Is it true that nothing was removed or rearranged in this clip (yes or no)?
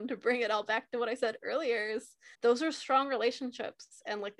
no